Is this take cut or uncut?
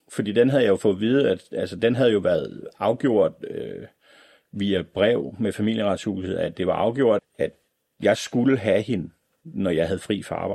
cut